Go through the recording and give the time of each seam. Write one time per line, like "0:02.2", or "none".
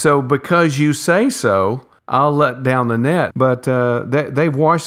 0:02.0
0:03.3